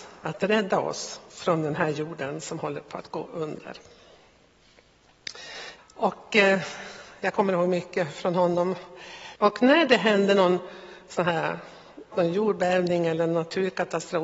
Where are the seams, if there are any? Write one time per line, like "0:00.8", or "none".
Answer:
0:05.8
0:09.4
0:12.1